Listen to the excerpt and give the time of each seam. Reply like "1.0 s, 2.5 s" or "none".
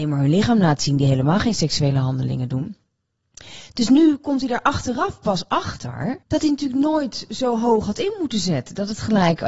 6.2 s